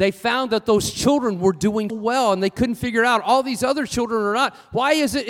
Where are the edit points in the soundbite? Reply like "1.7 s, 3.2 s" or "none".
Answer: 1.9 s